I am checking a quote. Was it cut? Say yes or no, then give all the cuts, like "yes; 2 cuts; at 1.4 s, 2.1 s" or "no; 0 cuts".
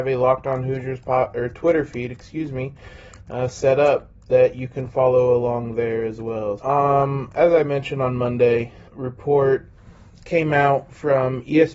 yes; 2 cuts; at 6.6 s, 8.9 s